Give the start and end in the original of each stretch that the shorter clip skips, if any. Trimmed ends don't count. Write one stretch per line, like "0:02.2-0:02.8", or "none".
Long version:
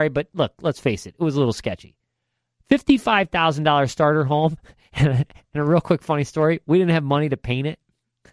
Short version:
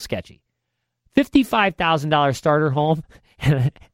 none